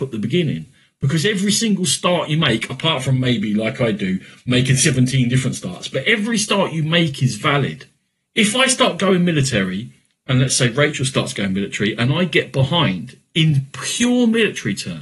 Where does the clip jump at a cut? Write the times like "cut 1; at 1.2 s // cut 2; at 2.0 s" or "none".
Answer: none